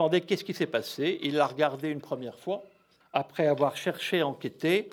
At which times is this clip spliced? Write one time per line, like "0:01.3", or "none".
0:03.0

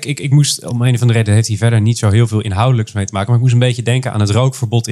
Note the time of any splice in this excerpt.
none

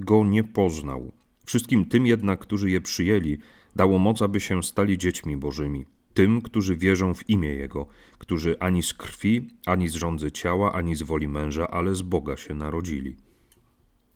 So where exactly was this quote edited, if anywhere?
0:01.4

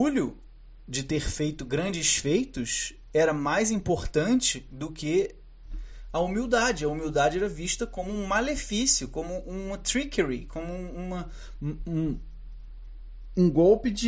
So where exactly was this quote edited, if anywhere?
none

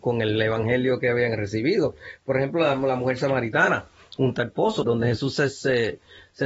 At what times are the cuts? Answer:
0:04.8

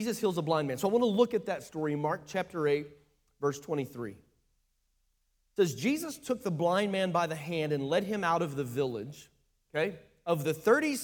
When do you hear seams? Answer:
0:09.6

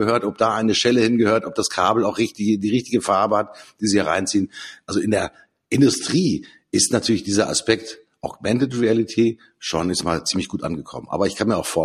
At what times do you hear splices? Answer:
none

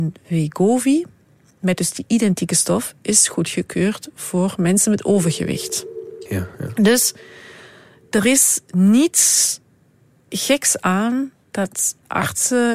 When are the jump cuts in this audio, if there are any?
0:06.3

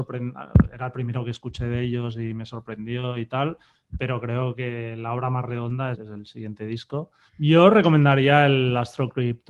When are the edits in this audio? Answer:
0:05.9
0:07.3

